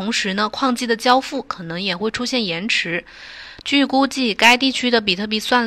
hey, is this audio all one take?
no; 1 cut; at 3.6 s

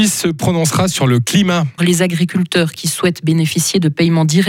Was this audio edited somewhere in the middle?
yes; 1 cut; at 1.8 s

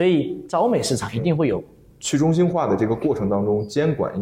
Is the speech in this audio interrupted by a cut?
yes; 1 cut; at 1.9 s

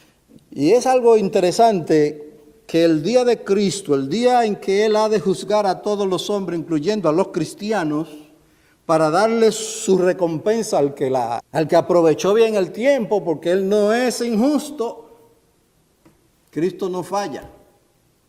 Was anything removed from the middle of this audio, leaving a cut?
yes; 1 cut; at 11.4 s

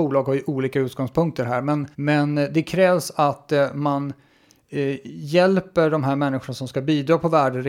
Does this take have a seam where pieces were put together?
yes; 1 cut; at 1.9 s

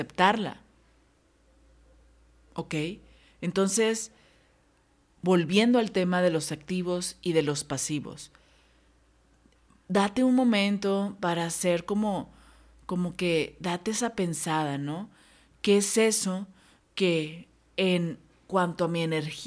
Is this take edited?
no; 0 cuts

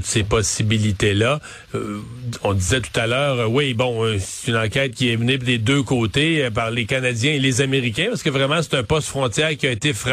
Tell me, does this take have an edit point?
no; 0 cuts

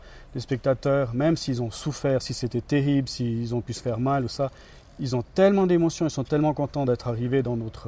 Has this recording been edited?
no; 0 cuts

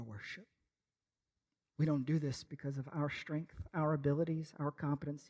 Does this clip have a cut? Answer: no; 0 cuts

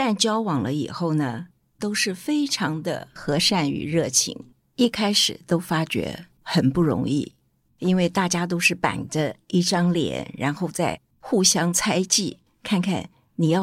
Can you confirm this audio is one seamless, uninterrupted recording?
no; 2 cuts; at 1.8 s, 4.7 s

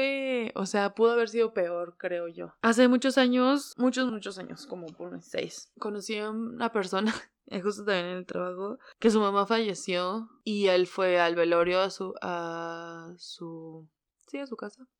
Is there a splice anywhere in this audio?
yes; 1 cut; at 4.1 s

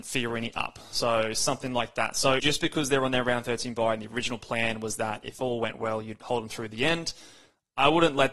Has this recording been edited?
yes; 1 cut; at 2.4 s

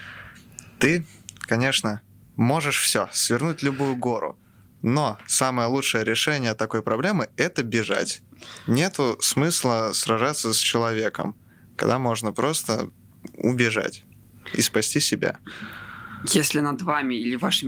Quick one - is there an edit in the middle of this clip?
no; 0 cuts

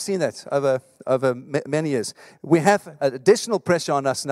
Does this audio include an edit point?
yes; 1 cut; at 3.0 s

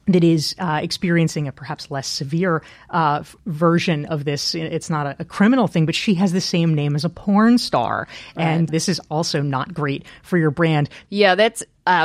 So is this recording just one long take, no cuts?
no; 2 cuts; at 8.7 s, 11.0 s

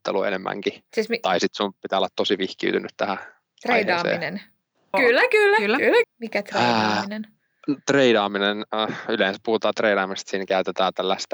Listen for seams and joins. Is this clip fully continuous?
no; 2 cuts; at 4.9 s, 6.0 s

